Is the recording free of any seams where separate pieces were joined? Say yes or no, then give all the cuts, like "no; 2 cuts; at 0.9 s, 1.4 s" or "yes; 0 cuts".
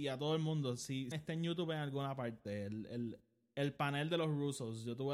no; 1 cut; at 1.1 s